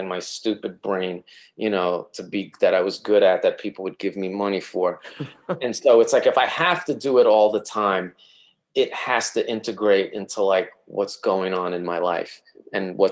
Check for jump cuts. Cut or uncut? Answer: uncut